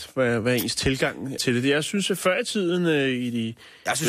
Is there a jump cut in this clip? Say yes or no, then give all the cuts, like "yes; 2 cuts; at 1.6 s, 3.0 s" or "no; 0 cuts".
yes; 1 cut; at 1.4 s